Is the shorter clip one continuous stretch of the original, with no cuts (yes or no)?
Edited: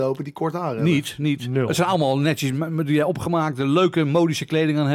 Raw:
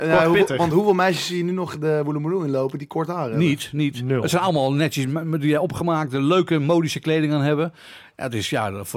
yes